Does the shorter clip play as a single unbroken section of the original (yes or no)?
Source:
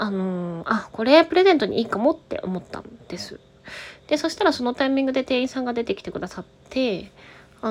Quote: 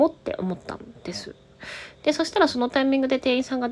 yes